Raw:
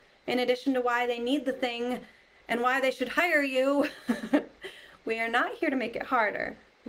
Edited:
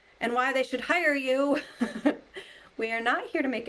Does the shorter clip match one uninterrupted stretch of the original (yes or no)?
yes